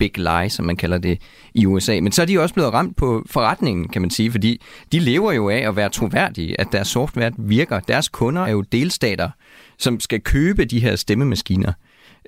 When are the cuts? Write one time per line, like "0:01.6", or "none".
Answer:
0:08.4